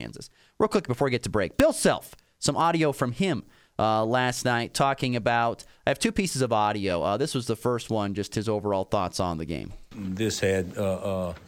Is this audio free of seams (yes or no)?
yes